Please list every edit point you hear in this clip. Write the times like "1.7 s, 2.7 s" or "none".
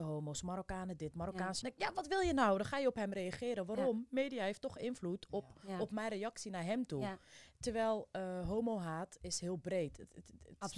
1.6 s

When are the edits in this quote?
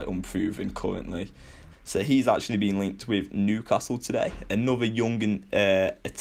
1.7 s

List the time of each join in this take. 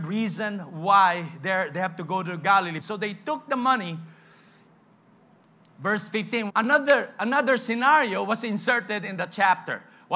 2.8 s, 6.5 s

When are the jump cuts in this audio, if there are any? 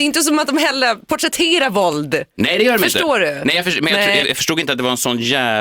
4.2 s

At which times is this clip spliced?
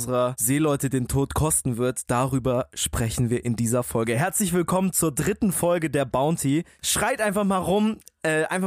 6.8 s

